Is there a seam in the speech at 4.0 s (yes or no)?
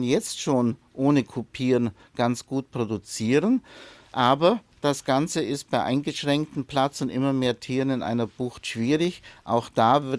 no